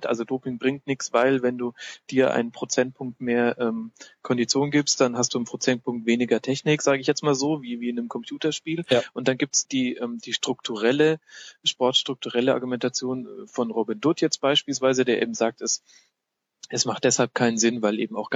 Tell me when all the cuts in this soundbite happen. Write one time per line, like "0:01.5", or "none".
0:09.6